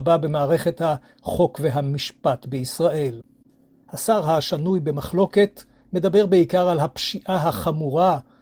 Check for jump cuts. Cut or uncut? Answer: cut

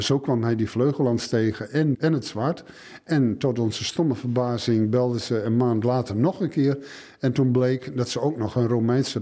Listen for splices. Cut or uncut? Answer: cut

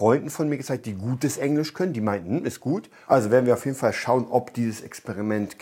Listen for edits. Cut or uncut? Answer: cut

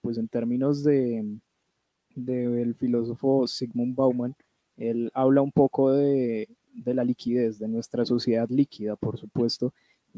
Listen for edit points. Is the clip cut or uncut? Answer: uncut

